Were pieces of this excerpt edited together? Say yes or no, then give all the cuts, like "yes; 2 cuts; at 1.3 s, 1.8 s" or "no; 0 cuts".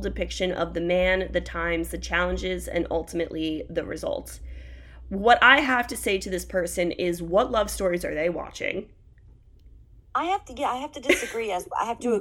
no; 0 cuts